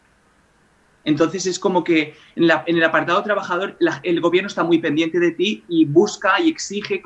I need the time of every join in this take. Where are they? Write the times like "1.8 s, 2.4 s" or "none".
5.7 s